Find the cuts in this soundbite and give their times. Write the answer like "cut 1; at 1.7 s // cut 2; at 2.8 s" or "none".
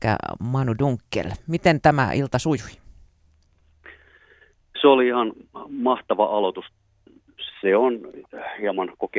cut 1; at 7.5 s